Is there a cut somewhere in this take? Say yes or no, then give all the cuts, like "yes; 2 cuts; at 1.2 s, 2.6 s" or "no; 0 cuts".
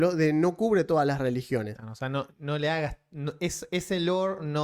yes; 1 cut; at 1.8 s